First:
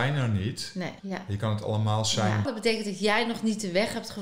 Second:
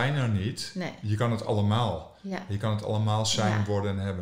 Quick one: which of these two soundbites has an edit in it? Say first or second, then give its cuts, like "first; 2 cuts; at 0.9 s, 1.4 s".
first; 2 cuts; at 1.0 s, 2.5 s